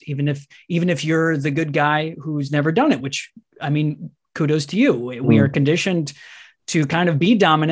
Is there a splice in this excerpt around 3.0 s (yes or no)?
no